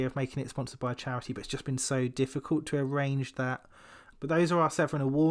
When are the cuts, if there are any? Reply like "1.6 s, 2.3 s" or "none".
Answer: 4.1 s